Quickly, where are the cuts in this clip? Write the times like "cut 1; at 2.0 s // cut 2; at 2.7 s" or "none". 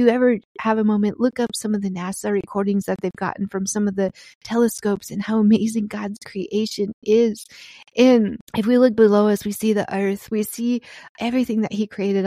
cut 1; at 8.5 s